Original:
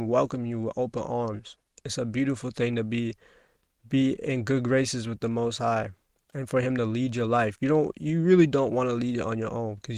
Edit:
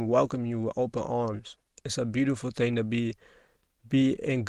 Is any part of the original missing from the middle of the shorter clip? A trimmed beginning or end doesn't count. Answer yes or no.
no